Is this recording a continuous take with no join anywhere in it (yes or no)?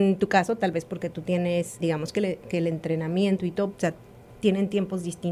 no